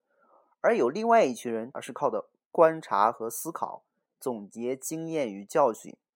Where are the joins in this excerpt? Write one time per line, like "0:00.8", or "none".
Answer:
0:01.7